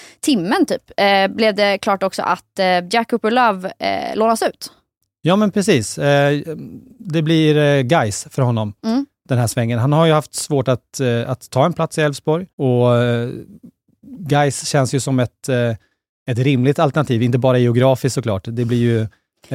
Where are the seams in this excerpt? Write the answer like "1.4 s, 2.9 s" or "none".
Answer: 12.5 s